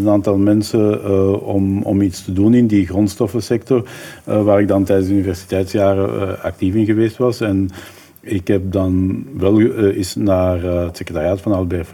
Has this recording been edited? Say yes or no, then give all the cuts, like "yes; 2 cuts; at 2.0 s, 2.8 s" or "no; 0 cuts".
no; 0 cuts